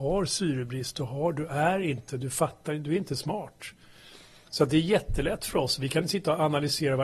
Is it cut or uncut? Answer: uncut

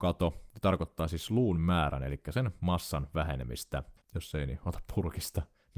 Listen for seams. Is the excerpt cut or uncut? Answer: cut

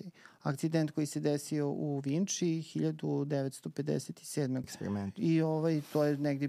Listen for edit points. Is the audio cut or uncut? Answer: cut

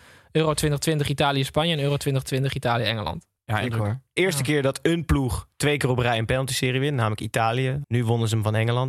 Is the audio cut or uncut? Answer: cut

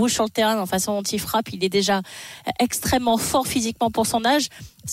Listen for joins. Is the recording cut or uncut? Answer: uncut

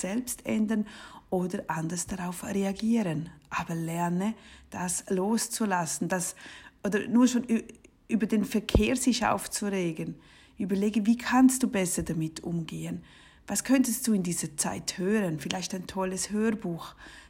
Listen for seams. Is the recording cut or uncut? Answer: uncut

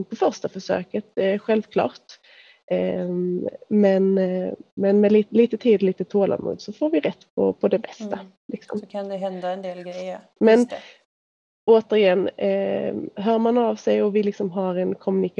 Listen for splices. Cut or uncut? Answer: cut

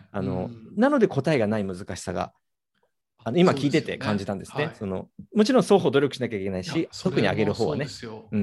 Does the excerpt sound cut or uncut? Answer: uncut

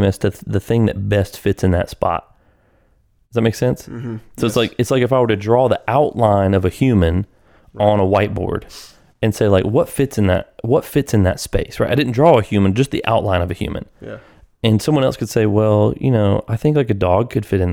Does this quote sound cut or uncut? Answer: uncut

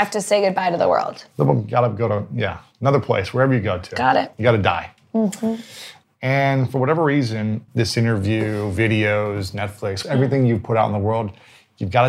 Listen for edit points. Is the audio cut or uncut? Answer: cut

